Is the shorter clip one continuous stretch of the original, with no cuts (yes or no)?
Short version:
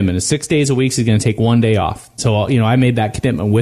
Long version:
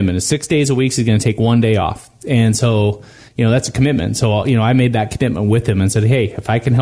no